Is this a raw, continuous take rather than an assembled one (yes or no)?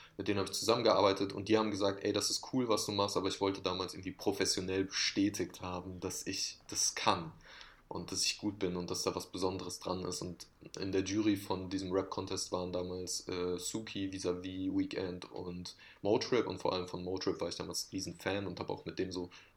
yes